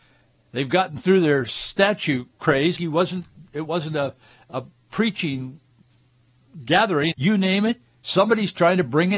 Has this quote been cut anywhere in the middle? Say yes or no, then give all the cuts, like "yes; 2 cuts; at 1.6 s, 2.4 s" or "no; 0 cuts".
yes; 2 cuts; at 2.8 s, 7.1 s